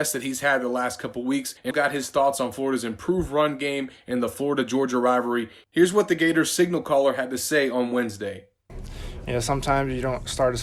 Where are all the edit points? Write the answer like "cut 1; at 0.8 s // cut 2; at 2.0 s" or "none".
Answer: cut 1; at 1.7 s